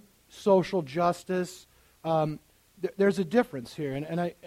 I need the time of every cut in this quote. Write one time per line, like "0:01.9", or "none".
none